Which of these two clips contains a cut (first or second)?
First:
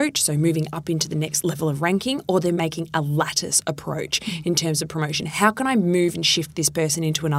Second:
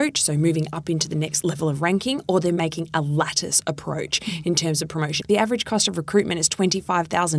second